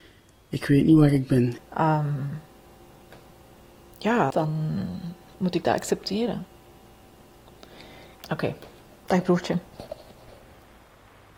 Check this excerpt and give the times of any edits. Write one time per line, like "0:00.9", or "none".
0:01.6
0:04.3
0:08.1